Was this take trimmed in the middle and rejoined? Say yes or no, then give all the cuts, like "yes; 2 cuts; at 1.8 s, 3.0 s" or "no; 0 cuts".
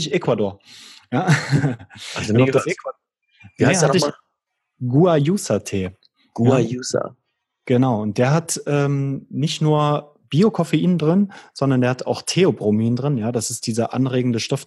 no; 0 cuts